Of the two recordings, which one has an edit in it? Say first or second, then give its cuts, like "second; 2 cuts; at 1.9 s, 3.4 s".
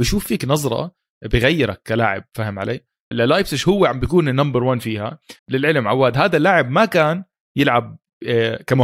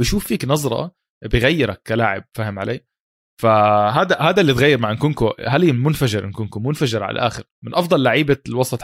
first; 2 cuts; at 3.1 s, 5.4 s